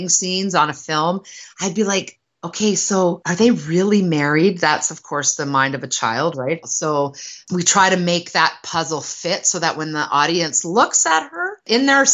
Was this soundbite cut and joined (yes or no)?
yes